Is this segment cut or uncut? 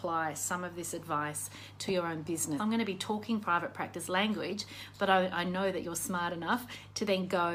cut